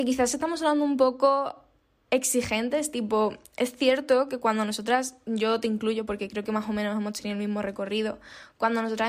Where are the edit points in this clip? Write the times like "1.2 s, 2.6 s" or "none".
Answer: none